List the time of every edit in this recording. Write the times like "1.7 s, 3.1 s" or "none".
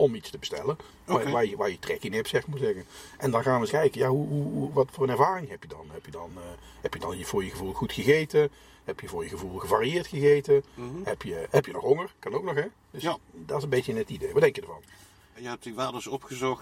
3.7 s, 15.3 s